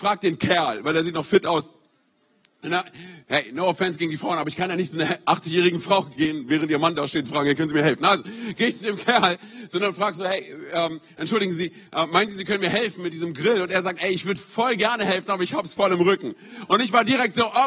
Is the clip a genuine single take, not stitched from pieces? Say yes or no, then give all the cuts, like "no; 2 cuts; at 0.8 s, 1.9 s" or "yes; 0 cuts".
yes; 0 cuts